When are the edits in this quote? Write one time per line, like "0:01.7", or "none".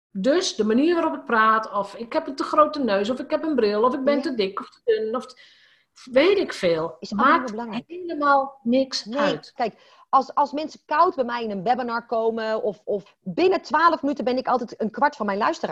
0:09.6
0:13.1